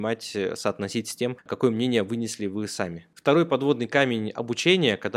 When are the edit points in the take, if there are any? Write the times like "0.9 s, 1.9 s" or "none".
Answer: none